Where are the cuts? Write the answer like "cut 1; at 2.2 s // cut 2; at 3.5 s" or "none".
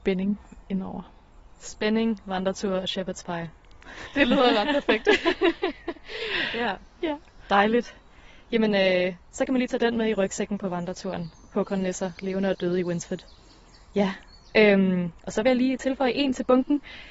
none